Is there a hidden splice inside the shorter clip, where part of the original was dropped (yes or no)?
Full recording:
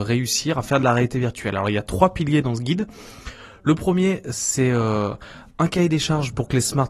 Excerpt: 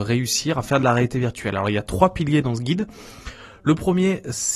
no